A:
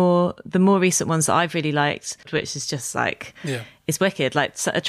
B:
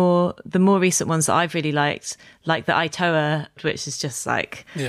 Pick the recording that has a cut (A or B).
A